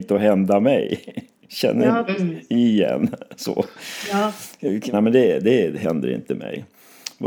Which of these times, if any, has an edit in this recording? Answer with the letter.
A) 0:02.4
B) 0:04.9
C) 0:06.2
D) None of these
B